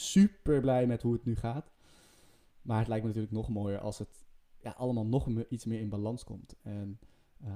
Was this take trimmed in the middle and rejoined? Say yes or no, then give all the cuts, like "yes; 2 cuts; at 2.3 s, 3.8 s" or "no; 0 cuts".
no; 0 cuts